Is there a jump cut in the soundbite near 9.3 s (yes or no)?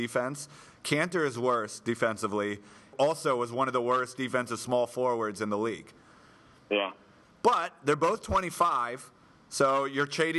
no